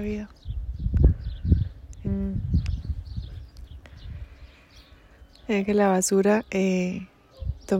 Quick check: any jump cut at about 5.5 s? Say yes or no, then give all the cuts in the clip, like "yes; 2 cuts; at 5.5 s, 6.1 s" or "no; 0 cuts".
yes; 2 cuts; at 2.0 s, 5.5 s